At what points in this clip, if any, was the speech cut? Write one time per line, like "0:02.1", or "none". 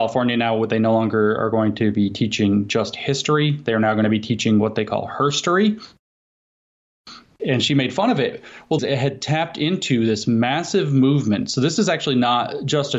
0:07.4
0:08.8